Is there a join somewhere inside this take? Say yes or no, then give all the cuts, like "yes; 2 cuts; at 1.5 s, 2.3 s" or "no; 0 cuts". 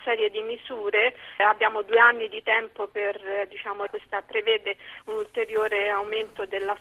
yes; 2 cuts; at 1.4 s, 3.9 s